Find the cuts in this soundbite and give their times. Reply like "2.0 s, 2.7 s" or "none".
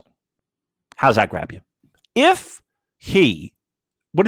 2.0 s

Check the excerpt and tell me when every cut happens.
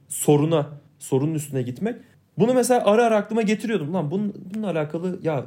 none

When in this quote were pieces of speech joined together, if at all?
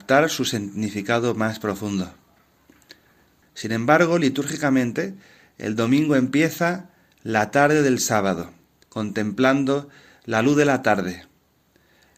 3.4 s, 8.8 s

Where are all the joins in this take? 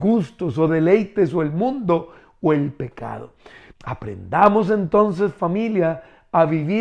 3.7 s

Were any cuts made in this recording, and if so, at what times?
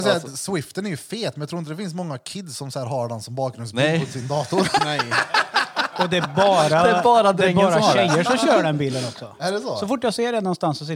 4.8 s

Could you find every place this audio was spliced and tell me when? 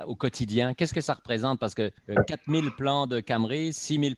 2.0 s

